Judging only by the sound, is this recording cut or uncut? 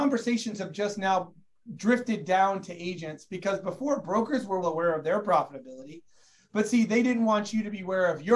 cut